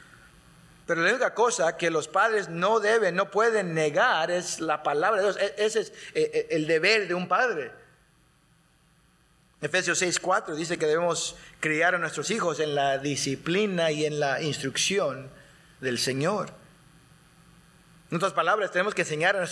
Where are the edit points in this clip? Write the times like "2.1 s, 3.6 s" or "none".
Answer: none